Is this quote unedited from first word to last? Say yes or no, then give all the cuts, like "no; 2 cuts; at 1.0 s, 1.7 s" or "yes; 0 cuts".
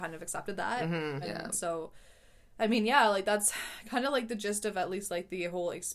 no; 1 cut; at 1.2 s